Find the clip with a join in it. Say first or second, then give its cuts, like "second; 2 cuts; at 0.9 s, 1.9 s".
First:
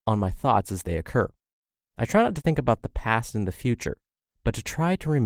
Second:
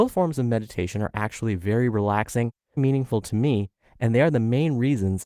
second; 1 cut; at 2.8 s